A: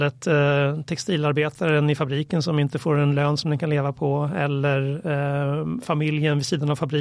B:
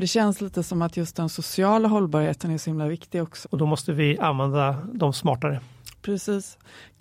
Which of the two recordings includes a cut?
B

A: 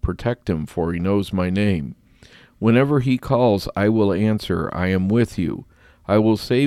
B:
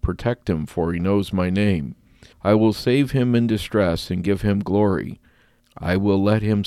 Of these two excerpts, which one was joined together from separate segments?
B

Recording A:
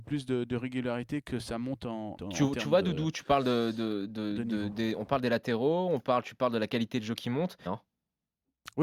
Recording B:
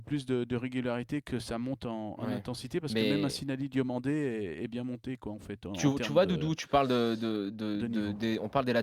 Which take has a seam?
A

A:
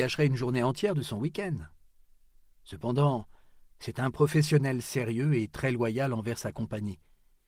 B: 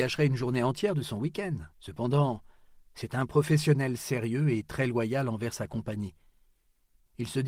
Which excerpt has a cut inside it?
B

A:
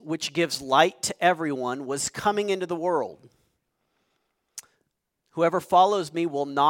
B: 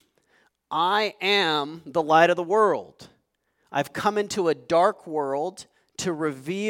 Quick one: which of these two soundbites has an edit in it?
A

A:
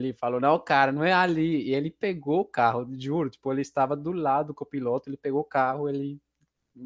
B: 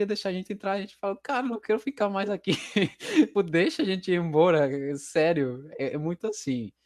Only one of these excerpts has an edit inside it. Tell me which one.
B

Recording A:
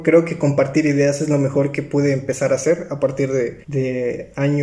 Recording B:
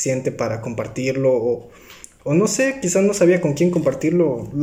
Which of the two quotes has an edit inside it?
A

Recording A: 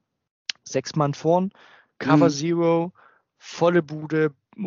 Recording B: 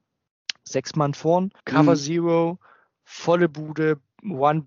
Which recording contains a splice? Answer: B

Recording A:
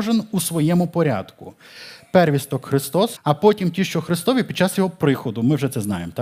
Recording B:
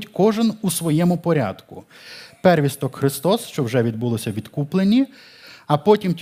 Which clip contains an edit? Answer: A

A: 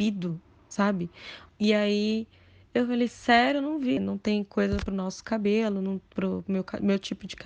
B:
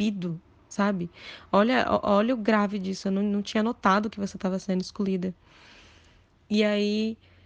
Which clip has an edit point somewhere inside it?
A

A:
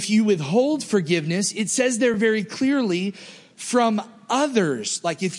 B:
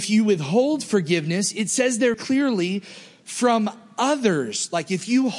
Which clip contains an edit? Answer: B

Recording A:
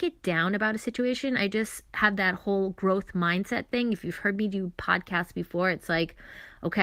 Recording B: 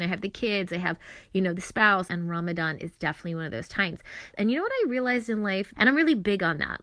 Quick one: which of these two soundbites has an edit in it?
B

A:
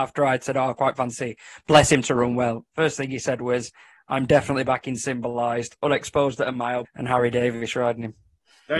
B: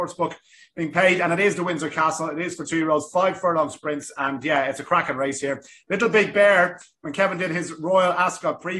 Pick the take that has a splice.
A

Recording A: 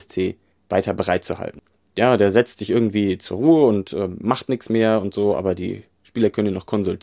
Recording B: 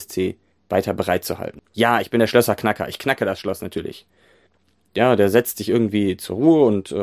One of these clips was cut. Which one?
B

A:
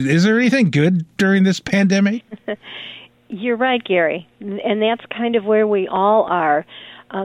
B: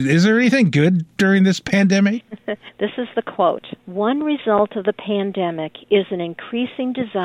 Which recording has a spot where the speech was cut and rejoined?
B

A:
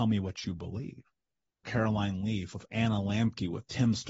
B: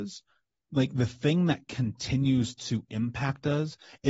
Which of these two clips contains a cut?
A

